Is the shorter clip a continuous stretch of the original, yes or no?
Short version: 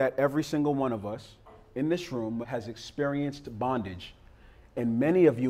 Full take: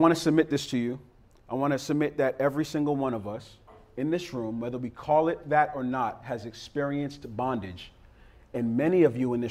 no